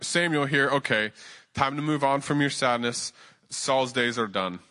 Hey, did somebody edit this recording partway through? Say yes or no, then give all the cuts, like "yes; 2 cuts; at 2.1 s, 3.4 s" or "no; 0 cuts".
no; 0 cuts